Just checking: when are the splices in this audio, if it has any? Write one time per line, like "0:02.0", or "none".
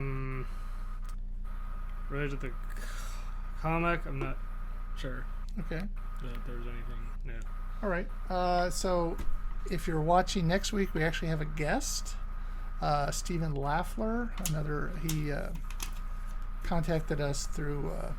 none